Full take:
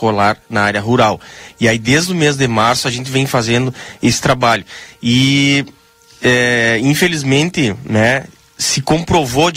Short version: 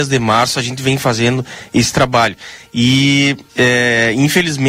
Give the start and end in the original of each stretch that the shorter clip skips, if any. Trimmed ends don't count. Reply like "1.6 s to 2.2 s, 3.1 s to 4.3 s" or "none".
5.8 s to 6.1 s